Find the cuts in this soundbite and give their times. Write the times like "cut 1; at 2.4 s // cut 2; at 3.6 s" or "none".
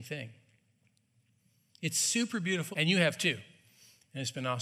cut 1; at 2.7 s